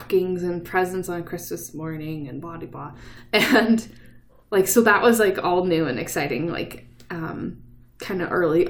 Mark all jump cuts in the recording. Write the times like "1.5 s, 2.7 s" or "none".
none